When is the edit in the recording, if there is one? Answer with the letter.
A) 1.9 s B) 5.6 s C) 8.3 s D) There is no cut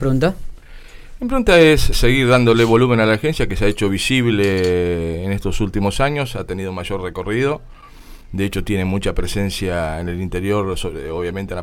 A